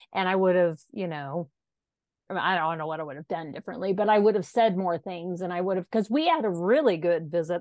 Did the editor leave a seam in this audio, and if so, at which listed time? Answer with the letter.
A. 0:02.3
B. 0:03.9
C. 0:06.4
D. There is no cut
A